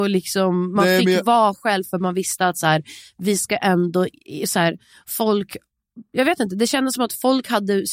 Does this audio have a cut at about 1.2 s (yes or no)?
no